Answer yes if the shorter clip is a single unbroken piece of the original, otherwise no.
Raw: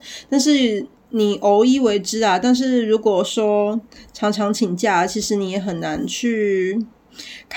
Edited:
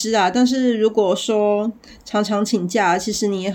yes